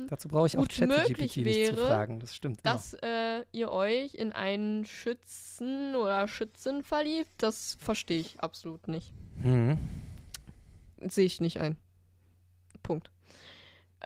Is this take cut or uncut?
uncut